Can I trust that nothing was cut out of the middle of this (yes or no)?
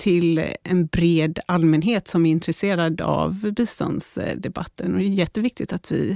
yes